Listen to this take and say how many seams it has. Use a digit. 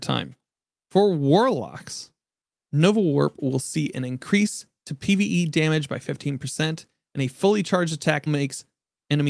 1